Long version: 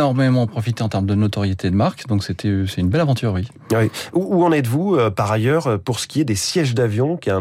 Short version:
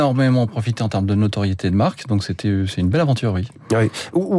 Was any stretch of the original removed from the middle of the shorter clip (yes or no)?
no